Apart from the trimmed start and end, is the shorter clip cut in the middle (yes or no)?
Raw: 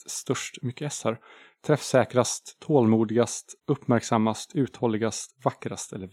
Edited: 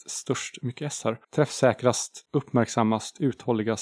yes